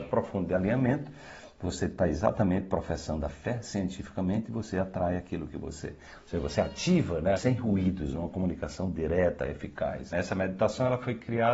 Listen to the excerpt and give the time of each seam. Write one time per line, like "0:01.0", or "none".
0:07.4
0:10.1